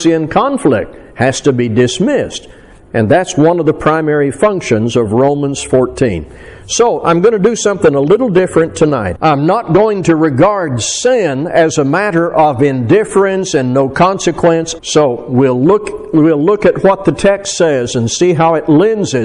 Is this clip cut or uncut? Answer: cut